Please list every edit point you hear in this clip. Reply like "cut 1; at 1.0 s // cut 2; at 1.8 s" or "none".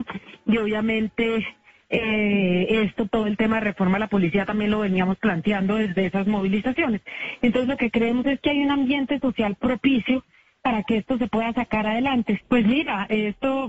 cut 1; at 3.1 s // cut 2; at 12.4 s